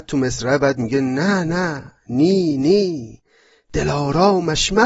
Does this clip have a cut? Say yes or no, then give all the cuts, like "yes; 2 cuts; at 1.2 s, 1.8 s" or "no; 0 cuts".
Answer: no; 0 cuts